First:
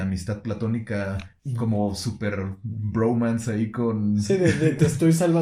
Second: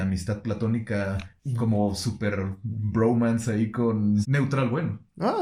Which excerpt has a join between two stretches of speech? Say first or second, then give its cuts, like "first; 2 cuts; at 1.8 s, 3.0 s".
second; 1 cut; at 4.2 s